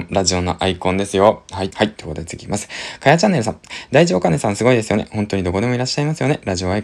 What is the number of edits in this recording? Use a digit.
1